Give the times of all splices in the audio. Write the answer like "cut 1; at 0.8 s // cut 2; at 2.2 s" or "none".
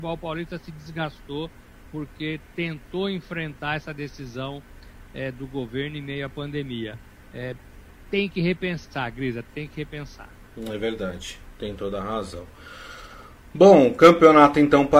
none